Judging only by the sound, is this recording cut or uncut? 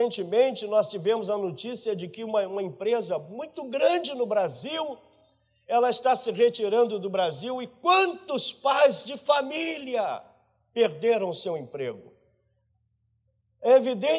uncut